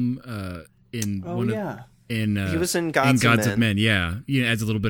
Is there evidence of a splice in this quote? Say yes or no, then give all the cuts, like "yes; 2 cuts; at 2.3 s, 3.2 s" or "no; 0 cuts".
no; 0 cuts